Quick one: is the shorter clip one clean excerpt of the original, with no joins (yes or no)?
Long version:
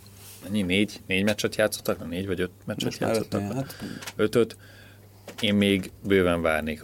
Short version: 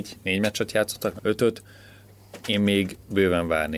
no